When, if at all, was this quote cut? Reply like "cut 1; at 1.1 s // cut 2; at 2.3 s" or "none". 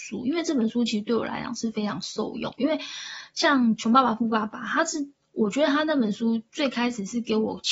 none